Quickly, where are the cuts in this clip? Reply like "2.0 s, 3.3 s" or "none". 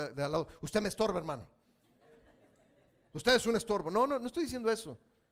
none